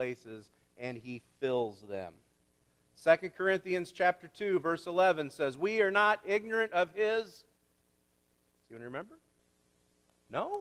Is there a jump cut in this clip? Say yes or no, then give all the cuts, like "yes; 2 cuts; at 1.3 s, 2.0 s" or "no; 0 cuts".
no; 0 cuts